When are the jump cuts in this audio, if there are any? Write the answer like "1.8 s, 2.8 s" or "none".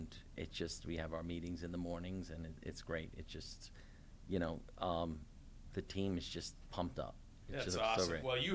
7.4 s